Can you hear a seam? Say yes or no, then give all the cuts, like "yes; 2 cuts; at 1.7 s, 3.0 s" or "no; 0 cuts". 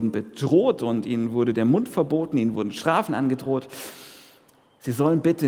no; 0 cuts